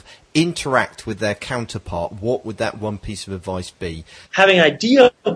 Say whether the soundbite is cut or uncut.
cut